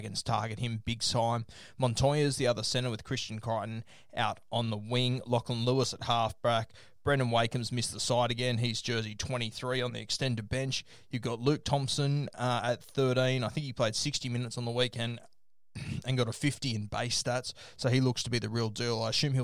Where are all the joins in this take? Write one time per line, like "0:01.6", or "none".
none